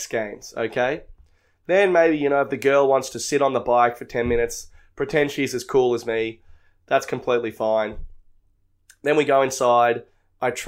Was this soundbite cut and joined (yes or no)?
no